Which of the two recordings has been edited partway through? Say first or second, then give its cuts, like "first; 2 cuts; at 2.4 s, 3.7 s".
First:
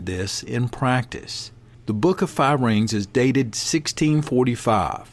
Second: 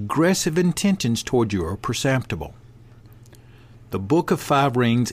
first; 1 cut; at 1.7 s